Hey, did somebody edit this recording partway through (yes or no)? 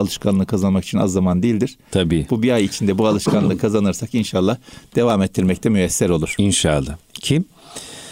no